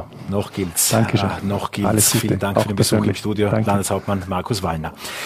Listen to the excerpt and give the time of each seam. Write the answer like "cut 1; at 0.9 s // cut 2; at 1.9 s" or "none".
none